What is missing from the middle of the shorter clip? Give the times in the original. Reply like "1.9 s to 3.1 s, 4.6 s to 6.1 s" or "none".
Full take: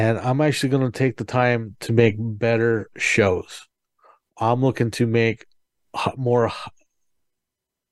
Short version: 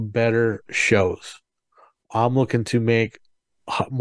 none